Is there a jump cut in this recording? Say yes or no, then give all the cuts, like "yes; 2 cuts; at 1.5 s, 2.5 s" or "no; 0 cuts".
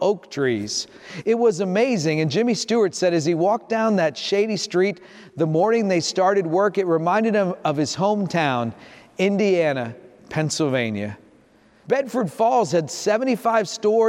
yes; 1 cut; at 11.8 s